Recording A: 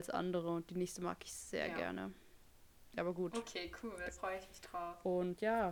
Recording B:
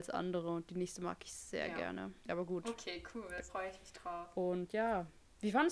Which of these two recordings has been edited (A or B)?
B